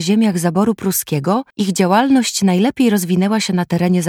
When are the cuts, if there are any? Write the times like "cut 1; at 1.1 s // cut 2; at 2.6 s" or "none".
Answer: cut 1; at 1.5 s